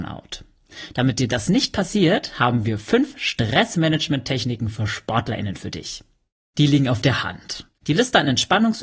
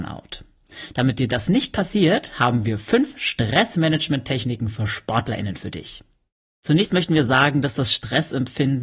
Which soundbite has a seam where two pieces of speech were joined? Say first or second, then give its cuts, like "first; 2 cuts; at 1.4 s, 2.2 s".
first; 2 cuts; at 6.5 s, 7.8 s